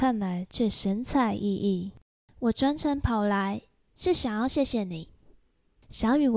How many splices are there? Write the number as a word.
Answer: zero